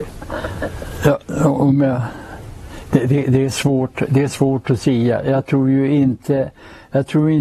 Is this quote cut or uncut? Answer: uncut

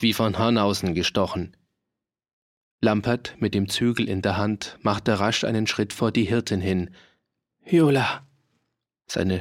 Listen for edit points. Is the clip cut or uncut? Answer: uncut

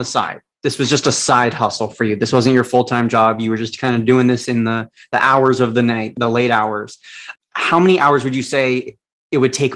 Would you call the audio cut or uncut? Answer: uncut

